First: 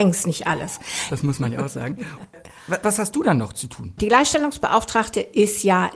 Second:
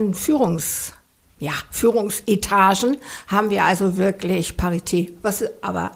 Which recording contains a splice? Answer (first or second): first